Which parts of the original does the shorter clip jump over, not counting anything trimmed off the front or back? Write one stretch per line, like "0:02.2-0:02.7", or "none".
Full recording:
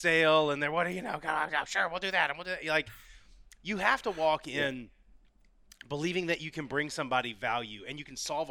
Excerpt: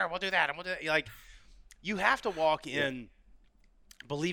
none